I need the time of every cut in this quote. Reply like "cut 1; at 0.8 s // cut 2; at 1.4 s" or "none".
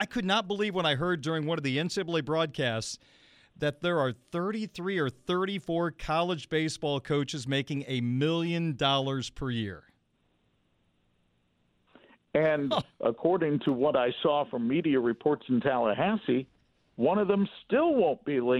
none

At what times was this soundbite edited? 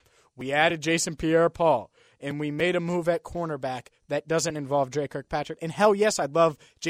cut 1; at 5.6 s

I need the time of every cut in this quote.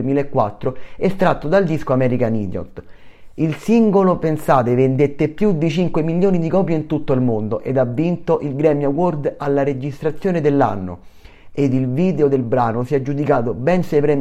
none

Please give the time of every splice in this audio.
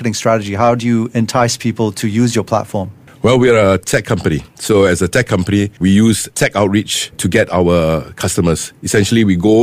cut 1; at 5.8 s // cut 2; at 7.1 s

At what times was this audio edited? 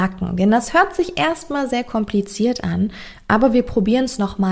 none

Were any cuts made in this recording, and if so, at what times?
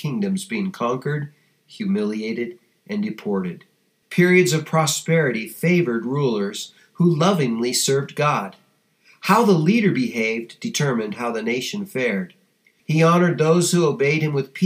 cut 1; at 4.0 s // cut 2; at 12.8 s

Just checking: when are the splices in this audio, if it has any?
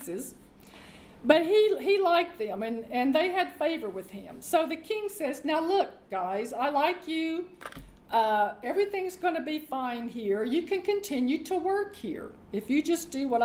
cut 1; at 8.6 s

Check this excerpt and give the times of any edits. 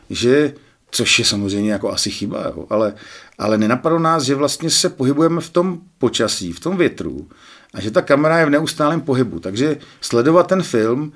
none

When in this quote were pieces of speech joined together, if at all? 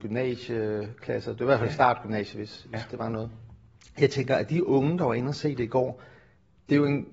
none

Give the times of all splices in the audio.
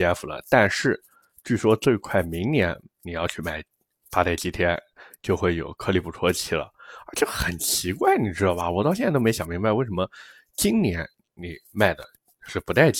none

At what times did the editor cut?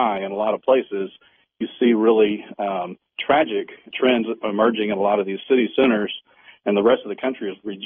none

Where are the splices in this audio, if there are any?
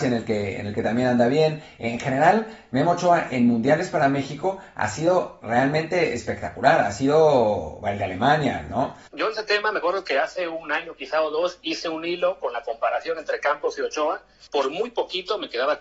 cut 1; at 9.1 s // cut 2; at 14.5 s

